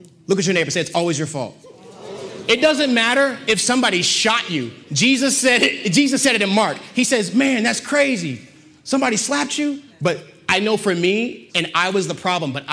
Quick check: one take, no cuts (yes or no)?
no